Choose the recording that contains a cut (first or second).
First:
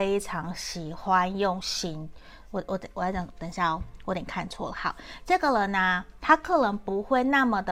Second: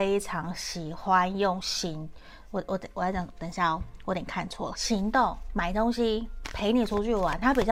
second